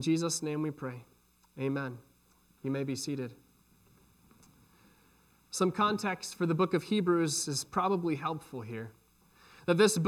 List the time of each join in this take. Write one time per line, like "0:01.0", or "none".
none